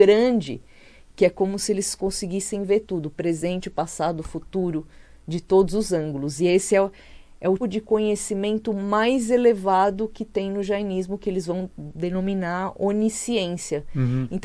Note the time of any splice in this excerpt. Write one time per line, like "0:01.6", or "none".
0:07.6